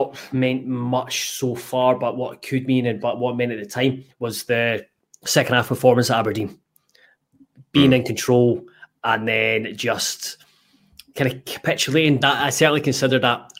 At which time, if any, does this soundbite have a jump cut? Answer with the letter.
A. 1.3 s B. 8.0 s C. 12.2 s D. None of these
C